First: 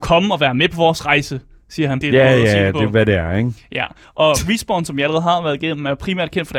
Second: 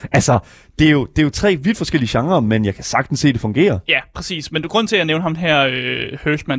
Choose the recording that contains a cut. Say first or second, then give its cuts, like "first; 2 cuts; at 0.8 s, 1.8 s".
first; 1 cut; at 2.0 s